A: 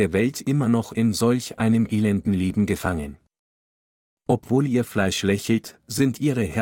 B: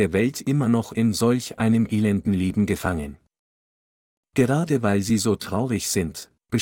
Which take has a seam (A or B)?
B